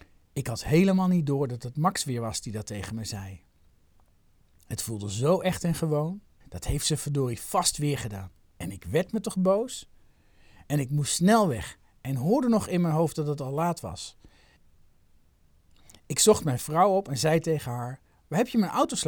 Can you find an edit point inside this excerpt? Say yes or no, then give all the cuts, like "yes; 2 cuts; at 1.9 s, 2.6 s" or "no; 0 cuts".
yes; 1 cut; at 6.4 s